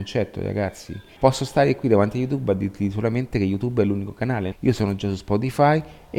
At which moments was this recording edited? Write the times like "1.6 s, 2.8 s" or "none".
1.2 s, 4.5 s